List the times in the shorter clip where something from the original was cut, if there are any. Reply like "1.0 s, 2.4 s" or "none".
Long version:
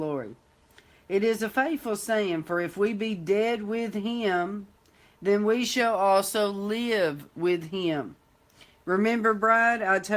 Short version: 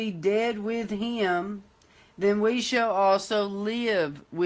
none